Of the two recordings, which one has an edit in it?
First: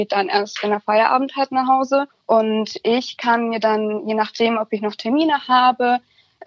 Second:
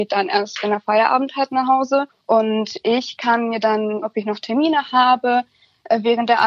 second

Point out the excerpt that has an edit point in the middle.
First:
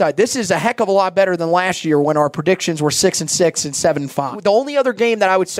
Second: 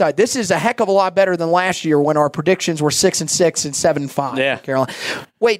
first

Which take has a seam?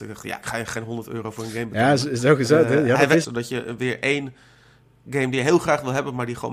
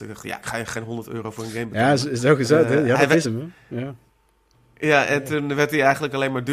first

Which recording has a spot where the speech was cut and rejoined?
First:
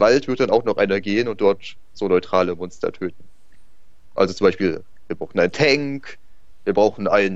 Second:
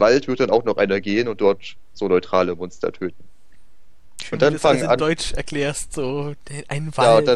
first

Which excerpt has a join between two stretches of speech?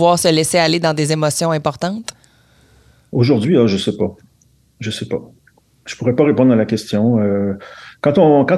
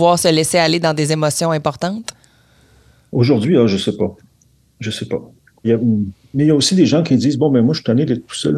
second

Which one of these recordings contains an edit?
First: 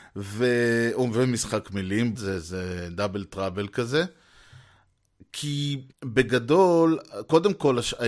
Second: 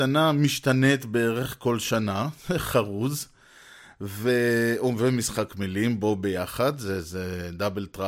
first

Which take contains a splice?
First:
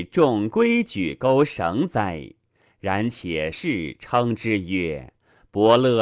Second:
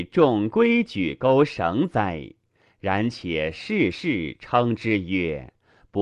first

